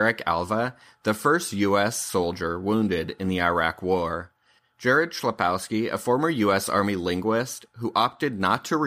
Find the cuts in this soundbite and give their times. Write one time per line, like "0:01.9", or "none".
none